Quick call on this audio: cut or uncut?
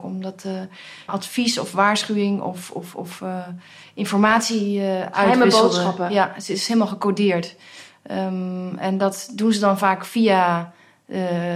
cut